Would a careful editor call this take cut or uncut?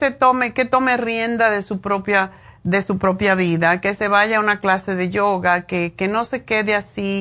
uncut